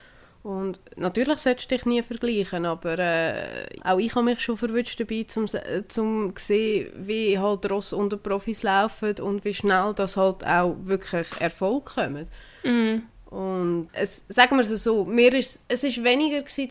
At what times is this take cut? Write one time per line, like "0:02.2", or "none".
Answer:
0:03.8